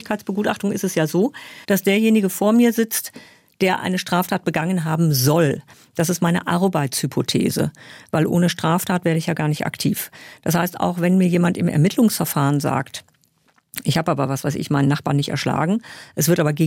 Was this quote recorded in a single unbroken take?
no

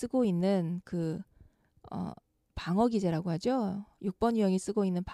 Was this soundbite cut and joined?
no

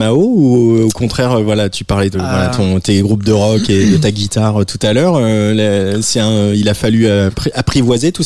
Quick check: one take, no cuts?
yes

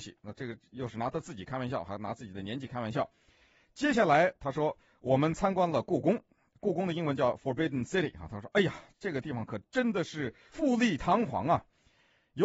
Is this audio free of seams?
yes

